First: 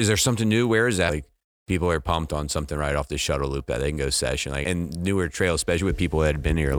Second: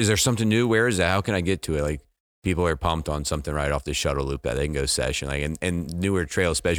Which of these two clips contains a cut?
first; 2 cuts; at 1.1 s, 4.6 s

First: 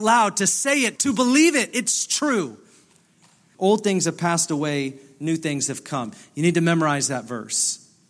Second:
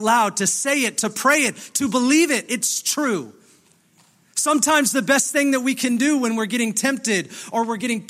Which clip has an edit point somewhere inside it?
first; 2 cuts; at 1.0 s, 3.5 s

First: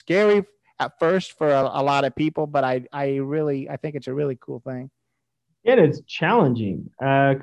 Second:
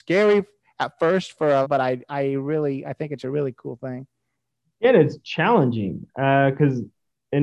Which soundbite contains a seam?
second; 1 cut; at 1.6 s

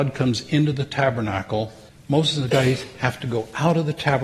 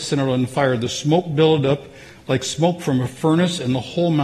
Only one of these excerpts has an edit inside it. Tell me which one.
first; 1 cut; at 1.9 s

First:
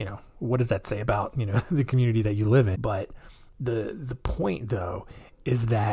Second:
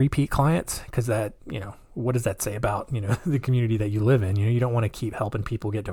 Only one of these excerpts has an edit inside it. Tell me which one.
first; 1 cut; at 2.7 s

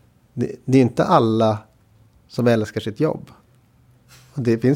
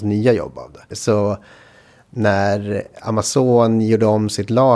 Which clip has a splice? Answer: second; 1 cut; at 0.9 s

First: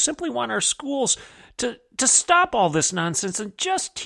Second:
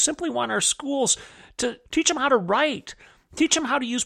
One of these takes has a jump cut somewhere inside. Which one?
second; 1 cut; at 1.9 s

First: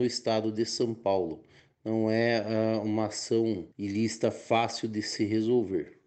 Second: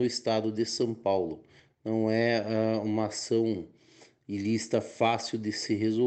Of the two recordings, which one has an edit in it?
first; 1 cut; at 3.7 s

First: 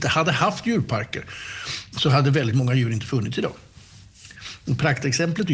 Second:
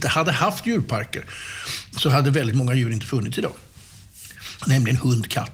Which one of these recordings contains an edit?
second; 1 cut; at 4.6 s

